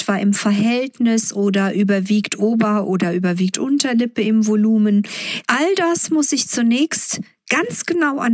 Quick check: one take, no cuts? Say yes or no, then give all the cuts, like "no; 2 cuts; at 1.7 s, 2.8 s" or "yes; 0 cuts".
no; 1 cut; at 5.4 s